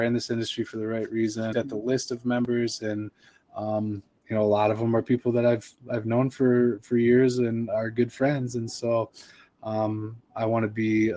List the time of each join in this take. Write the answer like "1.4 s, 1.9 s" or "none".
1.5 s